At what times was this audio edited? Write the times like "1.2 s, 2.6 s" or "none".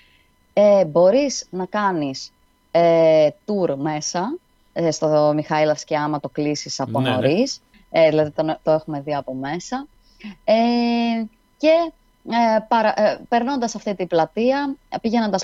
7.7 s